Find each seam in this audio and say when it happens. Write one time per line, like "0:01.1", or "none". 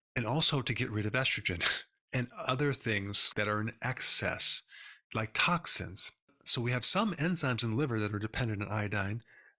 0:03.3